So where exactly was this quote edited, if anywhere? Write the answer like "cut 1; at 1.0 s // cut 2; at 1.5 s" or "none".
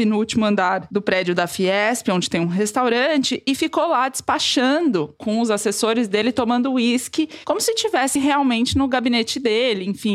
none